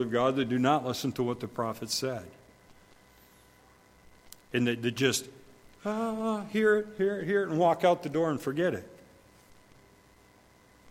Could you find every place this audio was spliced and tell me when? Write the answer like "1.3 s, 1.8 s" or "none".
none